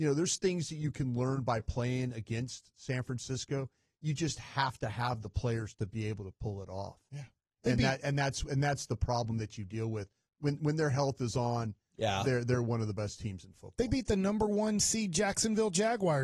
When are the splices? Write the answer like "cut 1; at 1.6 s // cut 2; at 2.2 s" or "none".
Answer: none